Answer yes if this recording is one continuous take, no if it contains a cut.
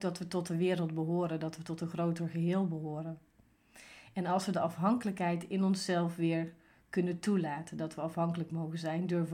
yes